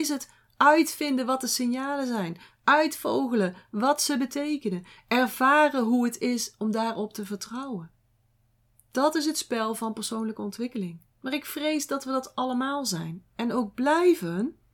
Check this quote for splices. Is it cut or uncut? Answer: cut